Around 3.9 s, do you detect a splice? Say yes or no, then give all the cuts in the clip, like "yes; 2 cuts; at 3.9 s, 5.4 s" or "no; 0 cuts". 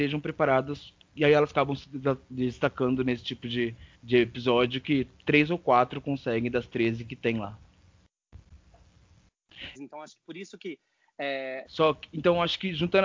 yes; 3 cuts; at 3.9 s, 9.7 s, 11.6 s